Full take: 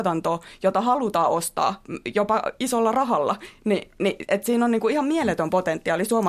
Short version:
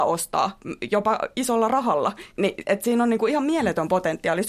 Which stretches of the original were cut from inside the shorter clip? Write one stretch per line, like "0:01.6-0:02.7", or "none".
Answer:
0:03.5-0:03.9